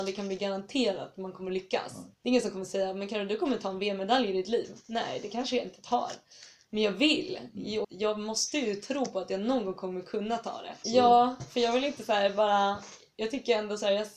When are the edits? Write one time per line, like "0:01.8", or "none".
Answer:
0:02.1
0:07.8
0:10.8

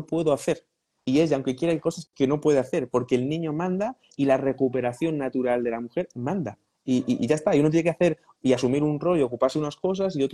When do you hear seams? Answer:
none

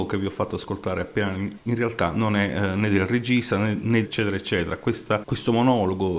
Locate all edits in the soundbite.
0:01.6
0:04.0
0:05.2

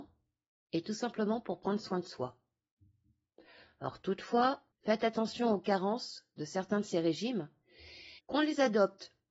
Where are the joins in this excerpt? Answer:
0:04.7
0:08.2

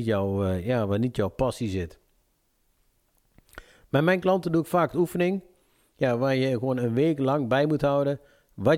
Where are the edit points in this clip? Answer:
none

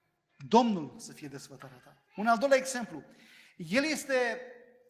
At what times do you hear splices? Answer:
0:02.1

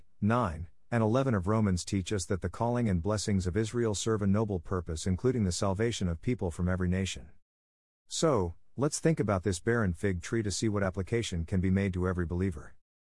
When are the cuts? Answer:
none

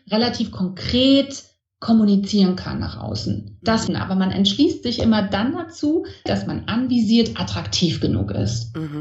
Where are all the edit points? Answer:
0:03.9
0:06.3

